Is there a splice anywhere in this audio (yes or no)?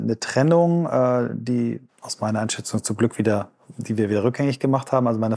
yes